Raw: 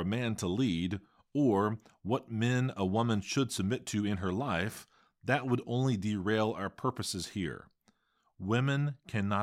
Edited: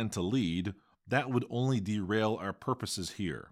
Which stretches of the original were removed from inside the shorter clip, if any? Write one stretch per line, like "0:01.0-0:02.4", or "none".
0:01.2-0:05.1